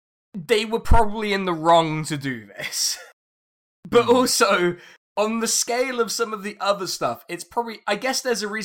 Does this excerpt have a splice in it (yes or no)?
no